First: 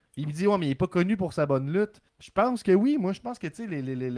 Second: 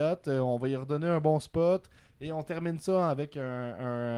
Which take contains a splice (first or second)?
first